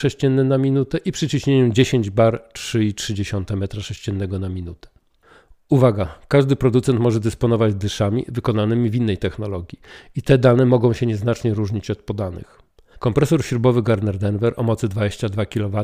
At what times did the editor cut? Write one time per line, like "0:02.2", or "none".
0:12.9